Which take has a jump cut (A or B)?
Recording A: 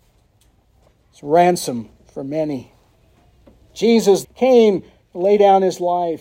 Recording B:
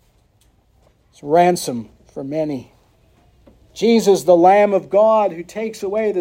A